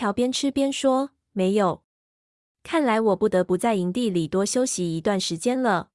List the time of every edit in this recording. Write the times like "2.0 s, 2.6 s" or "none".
none